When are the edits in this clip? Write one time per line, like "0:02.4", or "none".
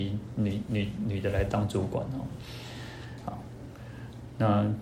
none